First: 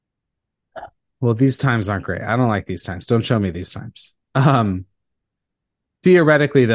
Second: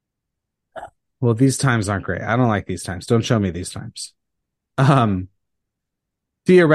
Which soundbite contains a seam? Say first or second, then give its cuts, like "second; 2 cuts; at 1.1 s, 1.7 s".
first; 1 cut; at 4.2 s